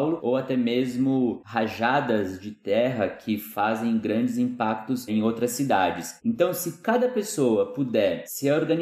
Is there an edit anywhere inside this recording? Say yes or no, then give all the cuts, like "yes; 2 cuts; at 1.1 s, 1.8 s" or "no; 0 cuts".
no; 0 cuts